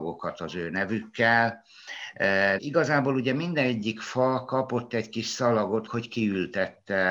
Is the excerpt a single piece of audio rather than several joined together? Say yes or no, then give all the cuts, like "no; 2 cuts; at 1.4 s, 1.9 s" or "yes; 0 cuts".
no; 2 cuts; at 2.6 s, 5.9 s